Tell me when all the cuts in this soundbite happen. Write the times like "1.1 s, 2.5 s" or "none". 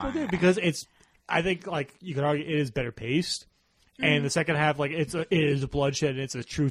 none